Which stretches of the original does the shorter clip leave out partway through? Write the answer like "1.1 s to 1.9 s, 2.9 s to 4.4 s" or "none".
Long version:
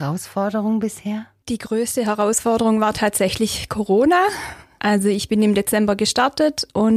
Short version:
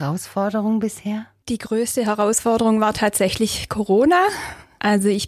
none